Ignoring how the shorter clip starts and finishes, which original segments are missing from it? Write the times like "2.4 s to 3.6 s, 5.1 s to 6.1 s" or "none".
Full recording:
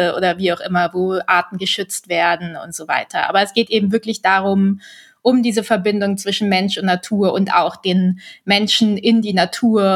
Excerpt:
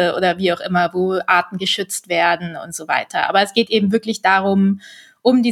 none